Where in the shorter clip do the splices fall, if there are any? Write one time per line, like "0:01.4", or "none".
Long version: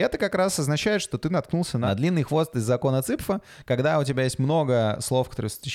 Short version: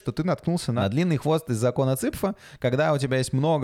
none